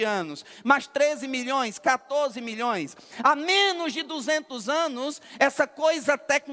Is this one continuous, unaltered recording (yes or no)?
yes